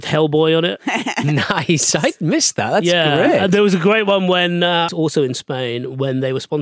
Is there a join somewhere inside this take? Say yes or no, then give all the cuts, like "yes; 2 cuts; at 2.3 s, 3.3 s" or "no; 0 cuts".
yes; 1 cut; at 4.9 s